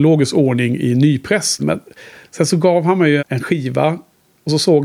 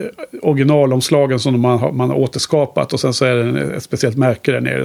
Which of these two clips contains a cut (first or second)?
first